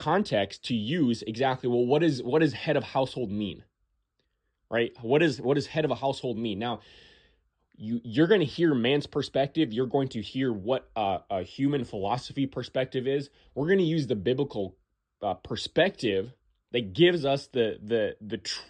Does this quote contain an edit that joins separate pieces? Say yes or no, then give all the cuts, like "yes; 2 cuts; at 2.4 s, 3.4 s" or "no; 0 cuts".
no; 0 cuts